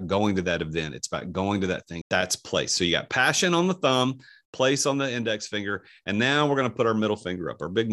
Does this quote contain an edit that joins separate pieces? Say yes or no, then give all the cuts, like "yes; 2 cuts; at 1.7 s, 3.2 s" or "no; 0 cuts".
yes; 1 cut; at 2.0 s